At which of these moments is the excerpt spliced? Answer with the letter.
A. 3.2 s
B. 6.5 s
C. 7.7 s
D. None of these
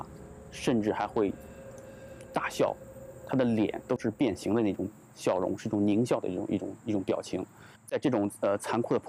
C